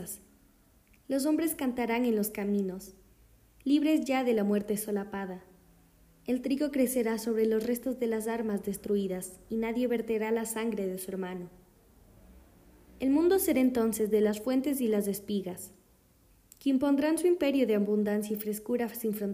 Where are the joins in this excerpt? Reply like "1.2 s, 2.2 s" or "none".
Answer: none